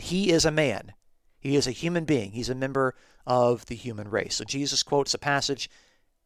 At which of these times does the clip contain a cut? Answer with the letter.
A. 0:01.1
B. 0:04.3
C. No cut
C